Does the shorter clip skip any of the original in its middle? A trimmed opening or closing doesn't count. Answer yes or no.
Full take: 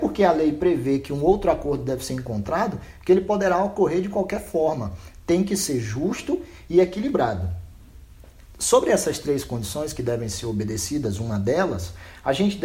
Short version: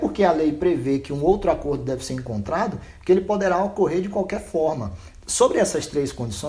yes